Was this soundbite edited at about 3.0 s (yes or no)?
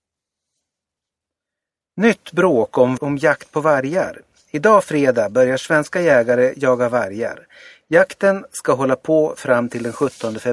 yes